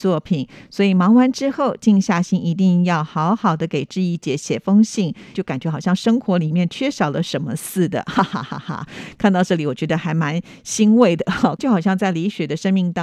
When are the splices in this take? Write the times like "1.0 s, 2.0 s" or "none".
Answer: 5.3 s, 11.6 s